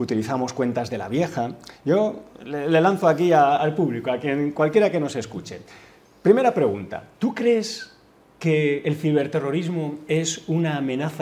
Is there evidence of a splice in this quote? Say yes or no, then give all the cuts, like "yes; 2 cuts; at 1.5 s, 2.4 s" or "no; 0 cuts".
no; 0 cuts